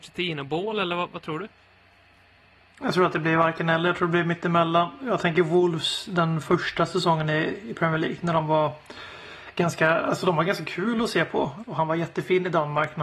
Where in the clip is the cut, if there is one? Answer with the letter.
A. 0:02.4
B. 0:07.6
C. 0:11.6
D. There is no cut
C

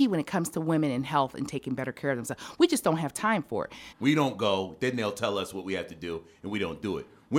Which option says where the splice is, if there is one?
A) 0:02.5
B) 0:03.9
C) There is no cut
B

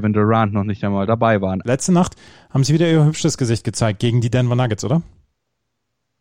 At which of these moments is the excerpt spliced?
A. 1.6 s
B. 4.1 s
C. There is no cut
A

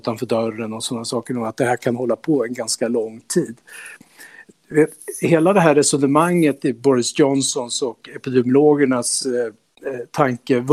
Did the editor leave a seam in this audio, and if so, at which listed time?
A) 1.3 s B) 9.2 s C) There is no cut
C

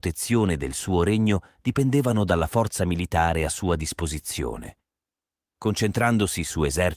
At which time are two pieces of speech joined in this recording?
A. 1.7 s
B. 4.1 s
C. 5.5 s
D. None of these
D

